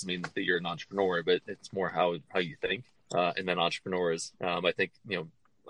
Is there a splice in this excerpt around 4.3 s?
yes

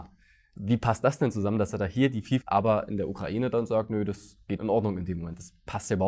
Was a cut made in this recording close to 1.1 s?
no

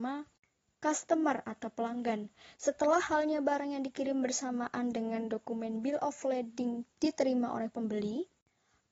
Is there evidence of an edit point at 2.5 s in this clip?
yes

